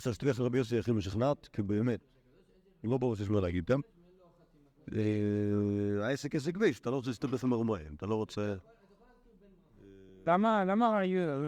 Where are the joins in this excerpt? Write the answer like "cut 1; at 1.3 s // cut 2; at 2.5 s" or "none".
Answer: none